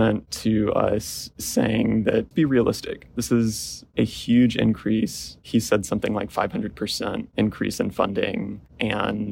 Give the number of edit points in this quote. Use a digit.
1